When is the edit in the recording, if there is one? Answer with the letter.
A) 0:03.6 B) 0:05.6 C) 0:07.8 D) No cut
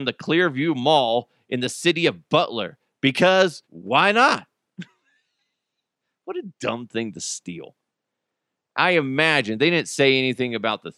A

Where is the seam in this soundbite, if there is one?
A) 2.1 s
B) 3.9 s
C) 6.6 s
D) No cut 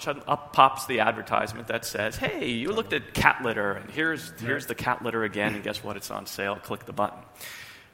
D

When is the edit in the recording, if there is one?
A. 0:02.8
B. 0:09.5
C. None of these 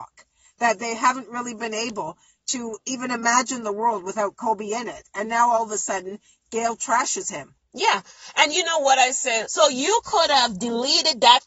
B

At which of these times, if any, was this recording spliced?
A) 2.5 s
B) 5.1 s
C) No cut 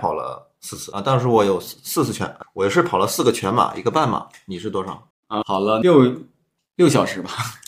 B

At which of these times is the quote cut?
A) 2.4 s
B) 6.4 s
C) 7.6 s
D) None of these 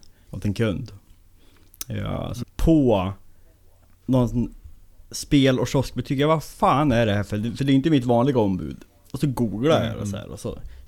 A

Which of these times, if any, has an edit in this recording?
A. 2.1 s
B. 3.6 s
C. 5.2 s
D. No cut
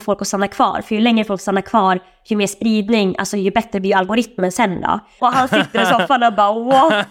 C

